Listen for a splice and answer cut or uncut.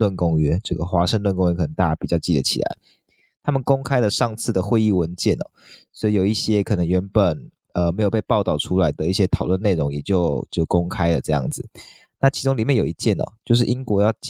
uncut